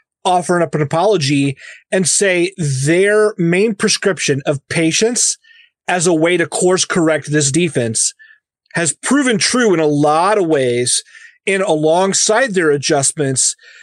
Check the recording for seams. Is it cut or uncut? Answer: uncut